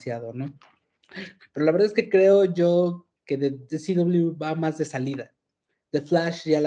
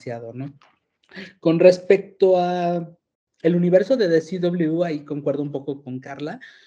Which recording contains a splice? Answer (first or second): first